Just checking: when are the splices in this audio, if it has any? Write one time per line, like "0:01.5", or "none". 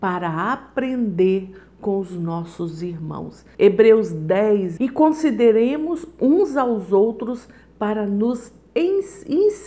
0:03.5
0:04.8